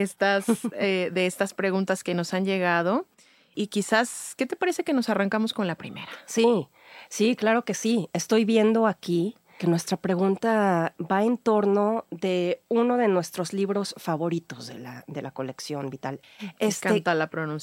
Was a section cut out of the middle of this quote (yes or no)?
yes